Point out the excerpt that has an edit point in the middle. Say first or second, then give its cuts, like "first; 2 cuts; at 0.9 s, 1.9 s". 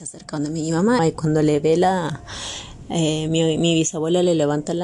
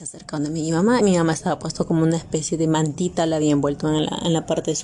first; 1 cut; at 1.0 s